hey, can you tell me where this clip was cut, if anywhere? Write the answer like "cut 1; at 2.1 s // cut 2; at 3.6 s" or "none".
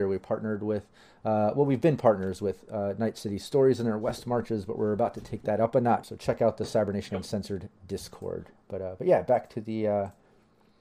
cut 1; at 6.0 s